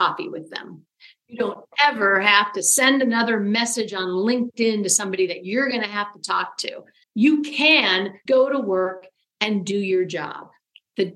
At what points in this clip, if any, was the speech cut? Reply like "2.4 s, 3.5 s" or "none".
7.0 s, 8.3 s

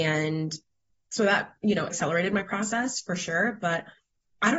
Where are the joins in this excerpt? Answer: 1.9 s

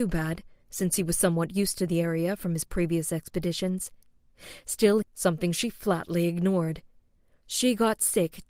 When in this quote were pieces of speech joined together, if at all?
5.0 s

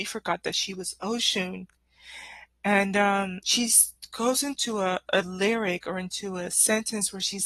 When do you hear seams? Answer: 3.4 s

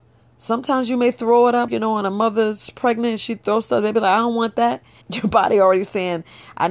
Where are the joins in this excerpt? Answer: 1.7 s, 5.0 s

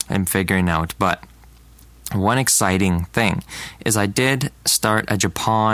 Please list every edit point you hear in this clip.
none

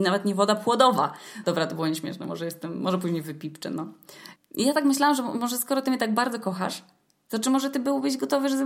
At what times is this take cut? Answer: 1.4 s, 4.4 s

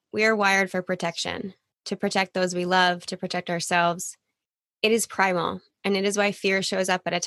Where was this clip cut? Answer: none

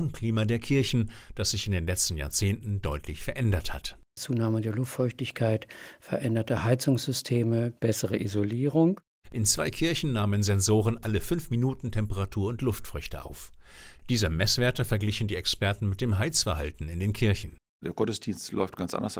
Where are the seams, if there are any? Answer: 9.2 s

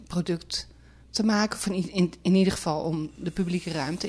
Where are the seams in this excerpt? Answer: none

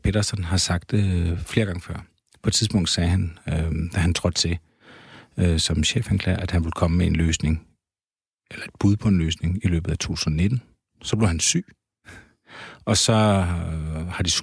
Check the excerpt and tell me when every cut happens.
none

